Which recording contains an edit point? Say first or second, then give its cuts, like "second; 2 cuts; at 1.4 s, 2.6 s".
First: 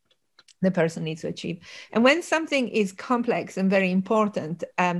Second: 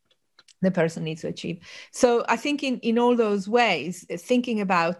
first; 1 cut; at 1.9 s